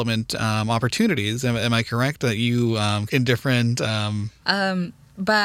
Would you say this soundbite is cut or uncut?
cut